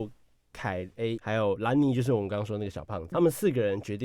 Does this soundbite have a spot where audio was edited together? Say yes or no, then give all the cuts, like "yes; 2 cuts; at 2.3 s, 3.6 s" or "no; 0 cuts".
yes; 2 cuts; at 1.2 s, 3.1 s